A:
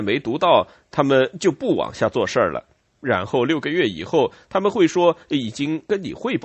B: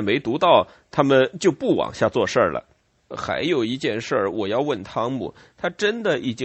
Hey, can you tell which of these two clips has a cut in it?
B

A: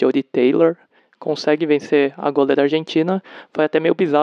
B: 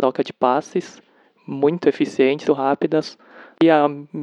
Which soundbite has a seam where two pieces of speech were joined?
B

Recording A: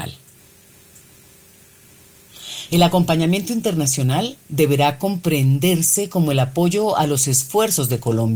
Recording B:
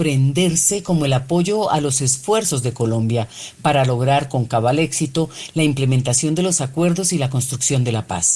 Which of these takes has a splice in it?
A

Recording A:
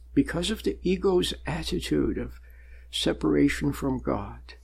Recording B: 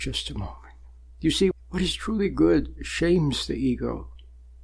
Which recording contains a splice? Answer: B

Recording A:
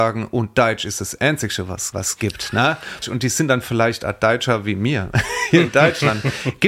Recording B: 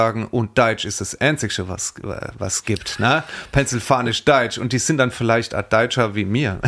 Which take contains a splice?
A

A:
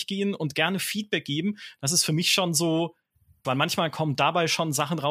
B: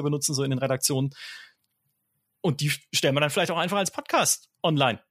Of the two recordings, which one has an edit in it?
A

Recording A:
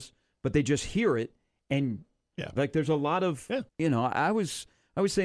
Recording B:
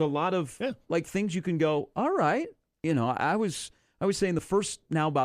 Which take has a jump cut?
A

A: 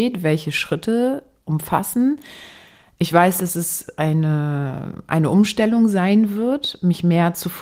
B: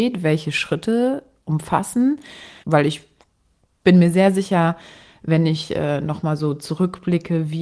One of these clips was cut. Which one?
B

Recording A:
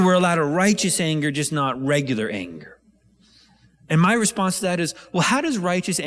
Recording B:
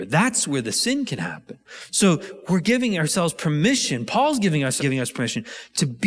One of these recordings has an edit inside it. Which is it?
B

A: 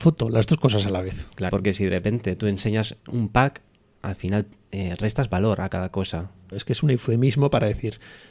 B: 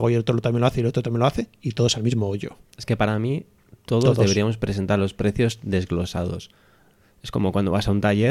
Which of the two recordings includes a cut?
A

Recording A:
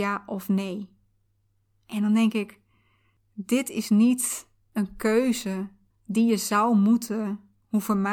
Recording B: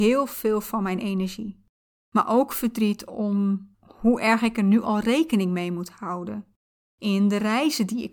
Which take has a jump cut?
B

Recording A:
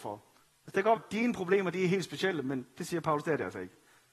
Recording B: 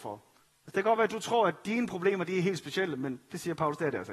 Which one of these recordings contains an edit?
A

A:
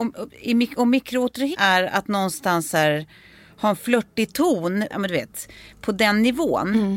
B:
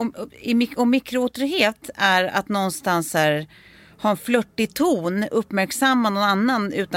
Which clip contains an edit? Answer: A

